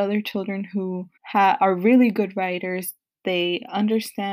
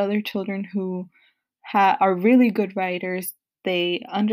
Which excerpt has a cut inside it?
first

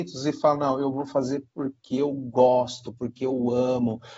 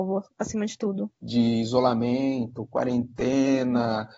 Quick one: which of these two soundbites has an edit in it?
second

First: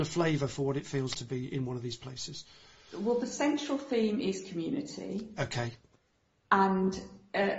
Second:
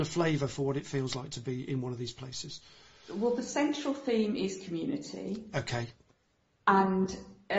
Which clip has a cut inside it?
first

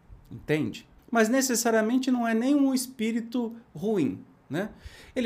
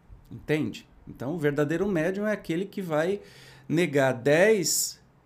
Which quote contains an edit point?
first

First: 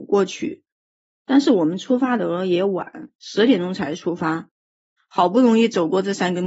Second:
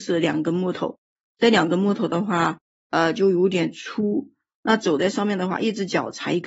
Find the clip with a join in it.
first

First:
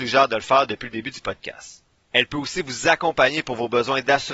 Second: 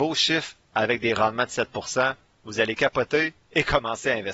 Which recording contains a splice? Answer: second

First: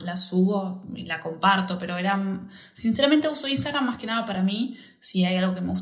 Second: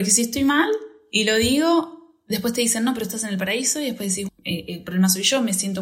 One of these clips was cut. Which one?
second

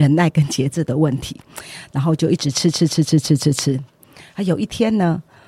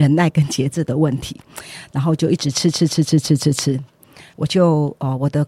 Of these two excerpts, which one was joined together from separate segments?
second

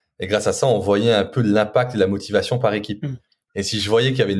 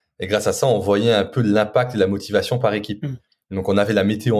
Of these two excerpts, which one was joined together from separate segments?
first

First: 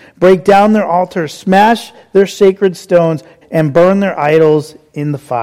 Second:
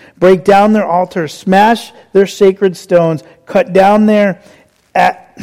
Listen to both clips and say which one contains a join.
first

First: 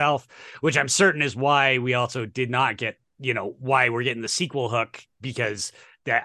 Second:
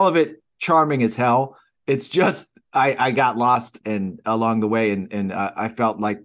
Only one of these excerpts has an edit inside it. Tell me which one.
second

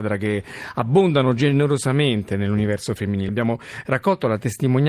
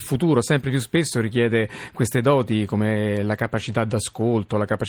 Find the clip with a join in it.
first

